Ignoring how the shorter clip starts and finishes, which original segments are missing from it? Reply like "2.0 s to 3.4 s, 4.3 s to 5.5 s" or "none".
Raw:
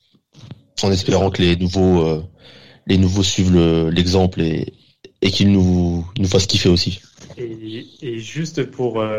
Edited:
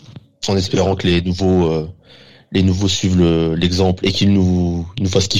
4.4 s to 5.2 s

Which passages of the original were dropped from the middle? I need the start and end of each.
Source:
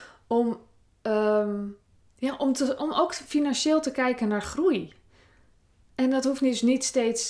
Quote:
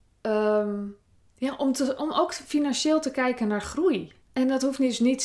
5.0 s to 5.8 s

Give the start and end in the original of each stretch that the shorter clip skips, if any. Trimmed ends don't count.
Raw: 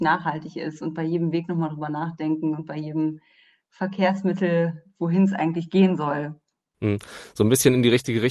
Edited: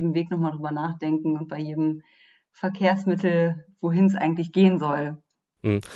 none

